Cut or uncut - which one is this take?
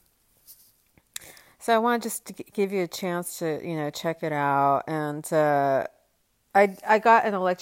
uncut